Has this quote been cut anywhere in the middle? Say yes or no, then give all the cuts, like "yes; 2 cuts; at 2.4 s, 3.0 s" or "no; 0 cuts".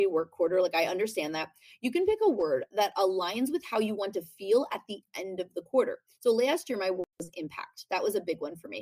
no; 0 cuts